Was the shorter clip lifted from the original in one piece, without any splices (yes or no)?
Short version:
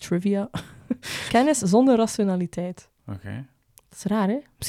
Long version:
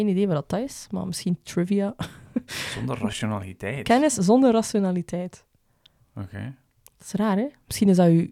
no